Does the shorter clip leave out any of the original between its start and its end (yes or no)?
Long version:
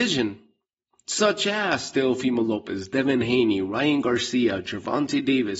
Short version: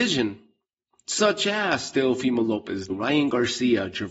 yes